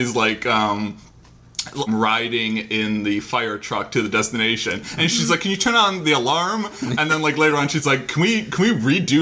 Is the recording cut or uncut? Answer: cut